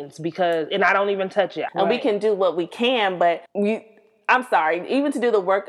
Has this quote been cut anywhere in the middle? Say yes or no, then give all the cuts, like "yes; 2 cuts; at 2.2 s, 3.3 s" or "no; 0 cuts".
yes; 2 cuts; at 1.7 s, 3.5 s